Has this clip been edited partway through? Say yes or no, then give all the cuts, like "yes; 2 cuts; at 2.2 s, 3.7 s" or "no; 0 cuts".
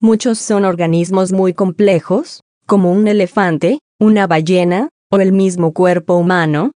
no; 0 cuts